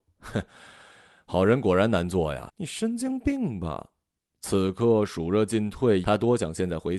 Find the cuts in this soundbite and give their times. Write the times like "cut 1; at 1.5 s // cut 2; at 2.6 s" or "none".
cut 1; at 2.5 s // cut 2; at 4.2 s // cut 3; at 6.0 s

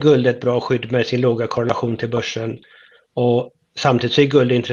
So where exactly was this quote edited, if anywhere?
none

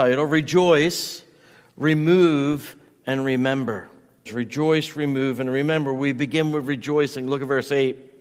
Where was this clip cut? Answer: cut 1; at 4.3 s

